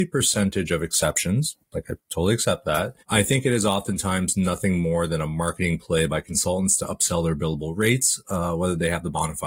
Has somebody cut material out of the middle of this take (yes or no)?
yes